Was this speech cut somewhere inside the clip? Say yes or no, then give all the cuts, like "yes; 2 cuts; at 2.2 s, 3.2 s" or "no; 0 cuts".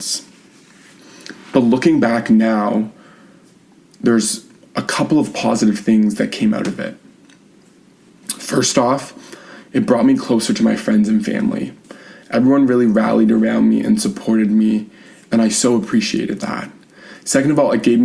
no; 0 cuts